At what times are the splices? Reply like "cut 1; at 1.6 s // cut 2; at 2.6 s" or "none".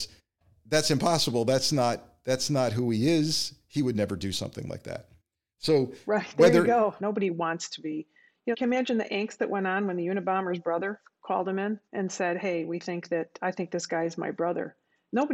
cut 1; at 7.0 s // cut 2; at 8.5 s // cut 3; at 11.9 s